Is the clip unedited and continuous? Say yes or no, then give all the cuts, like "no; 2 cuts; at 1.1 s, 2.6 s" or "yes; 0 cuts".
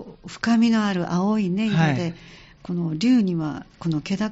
yes; 0 cuts